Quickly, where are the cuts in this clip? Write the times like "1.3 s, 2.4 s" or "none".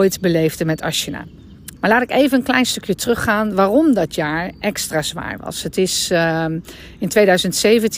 1.8 s